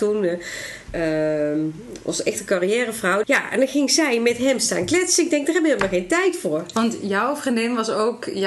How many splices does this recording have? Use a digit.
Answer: 1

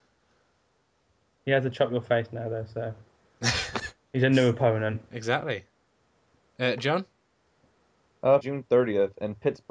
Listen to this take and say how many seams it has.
1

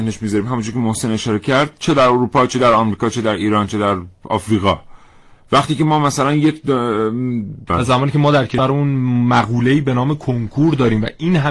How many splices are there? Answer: 1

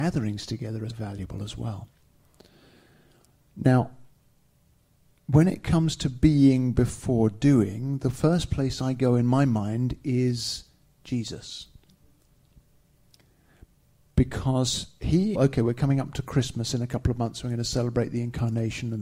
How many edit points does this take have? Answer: 2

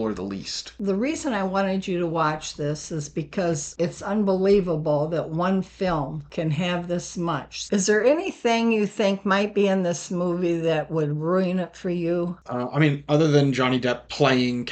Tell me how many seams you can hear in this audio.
1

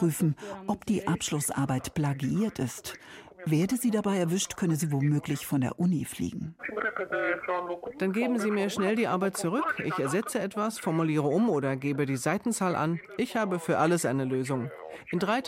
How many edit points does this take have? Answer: 0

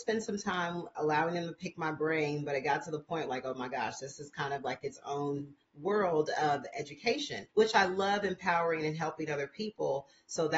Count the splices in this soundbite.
0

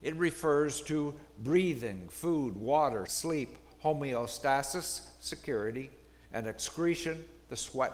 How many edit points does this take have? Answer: 1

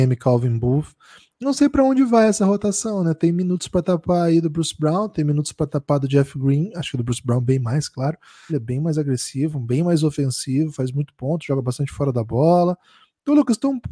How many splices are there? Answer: 1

